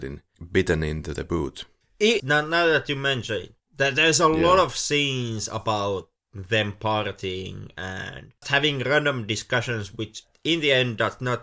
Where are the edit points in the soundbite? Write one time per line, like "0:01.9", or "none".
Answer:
0:02.2
0:08.4